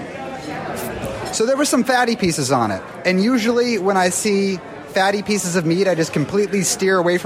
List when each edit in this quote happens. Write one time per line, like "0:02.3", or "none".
none